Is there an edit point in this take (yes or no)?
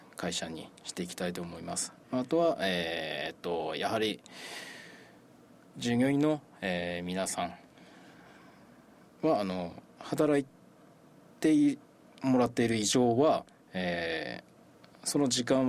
no